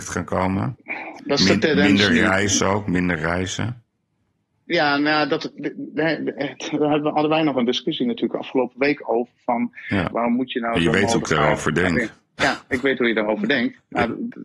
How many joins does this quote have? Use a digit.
1